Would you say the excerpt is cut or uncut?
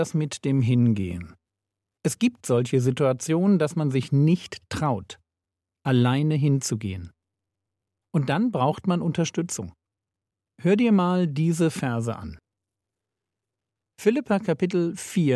cut